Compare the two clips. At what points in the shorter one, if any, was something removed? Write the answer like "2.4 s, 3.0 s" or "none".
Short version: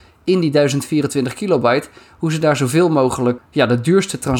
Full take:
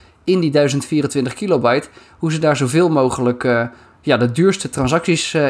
3.4 s